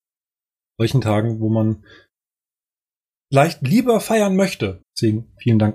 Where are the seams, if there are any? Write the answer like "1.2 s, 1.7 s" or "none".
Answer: 4.8 s